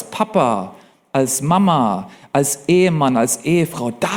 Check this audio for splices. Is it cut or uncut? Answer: uncut